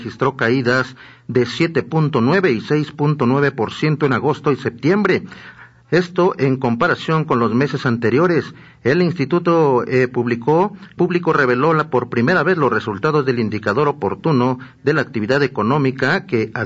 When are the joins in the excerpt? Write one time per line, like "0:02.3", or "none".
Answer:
0:11.0